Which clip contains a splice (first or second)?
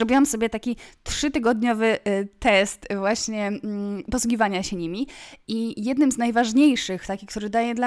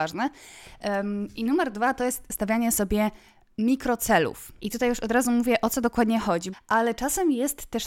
second